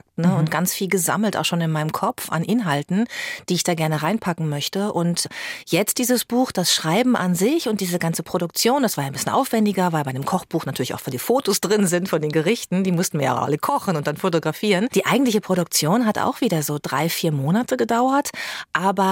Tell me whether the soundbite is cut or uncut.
cut